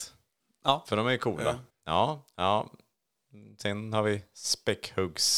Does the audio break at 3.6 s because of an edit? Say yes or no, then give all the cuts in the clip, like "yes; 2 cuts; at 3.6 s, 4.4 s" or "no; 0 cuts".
no; 1 cut; at 1.7 s